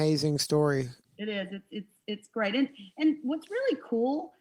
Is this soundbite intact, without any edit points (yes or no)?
no